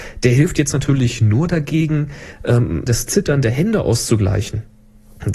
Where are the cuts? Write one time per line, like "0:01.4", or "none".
0:02.9